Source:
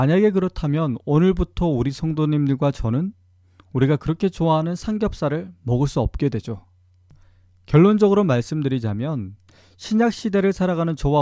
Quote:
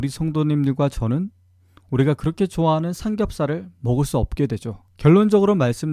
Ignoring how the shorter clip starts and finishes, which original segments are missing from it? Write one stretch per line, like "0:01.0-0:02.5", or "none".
0:06.7-0:07.6